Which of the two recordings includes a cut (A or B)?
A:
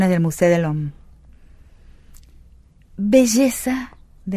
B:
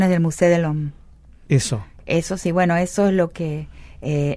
B